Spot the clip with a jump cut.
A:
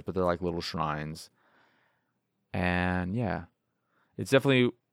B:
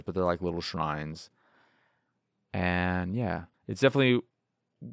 B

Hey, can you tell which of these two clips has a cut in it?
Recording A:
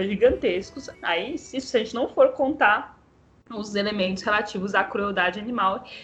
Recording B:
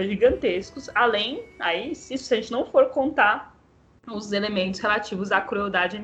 A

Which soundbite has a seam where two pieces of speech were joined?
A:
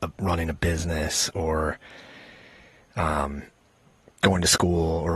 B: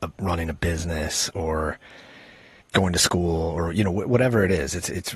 B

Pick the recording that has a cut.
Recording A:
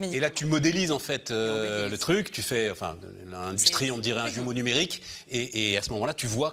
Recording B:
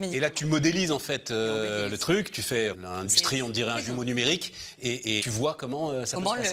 B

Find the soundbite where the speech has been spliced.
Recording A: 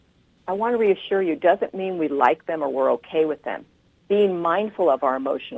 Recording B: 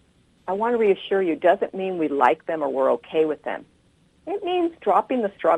A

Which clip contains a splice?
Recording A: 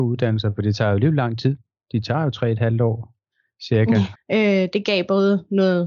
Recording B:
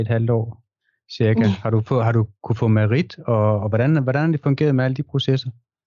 A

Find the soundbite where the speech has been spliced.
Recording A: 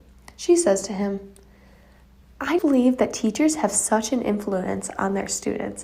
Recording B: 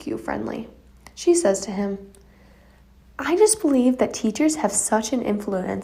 A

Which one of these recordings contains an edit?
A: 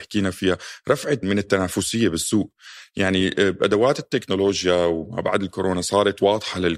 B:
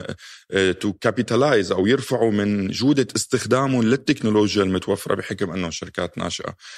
A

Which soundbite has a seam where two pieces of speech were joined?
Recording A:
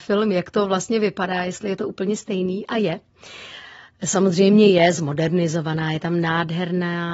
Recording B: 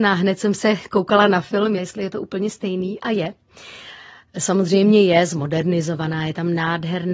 B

